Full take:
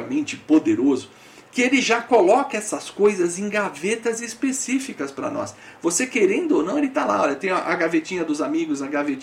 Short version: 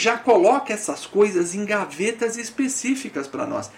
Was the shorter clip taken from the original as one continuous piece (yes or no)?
yes